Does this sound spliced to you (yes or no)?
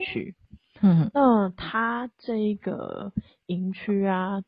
no